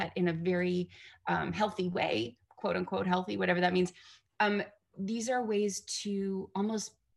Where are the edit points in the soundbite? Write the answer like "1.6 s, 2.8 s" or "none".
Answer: 4.9 s